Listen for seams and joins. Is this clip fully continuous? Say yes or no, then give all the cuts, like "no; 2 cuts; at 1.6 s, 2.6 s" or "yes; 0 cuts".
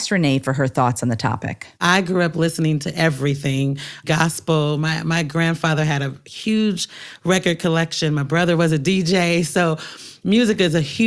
no; 2 cuts; at 1.7 s, 4.0 s